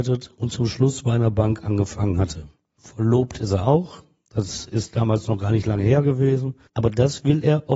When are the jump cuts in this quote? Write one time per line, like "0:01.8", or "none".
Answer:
0:06.7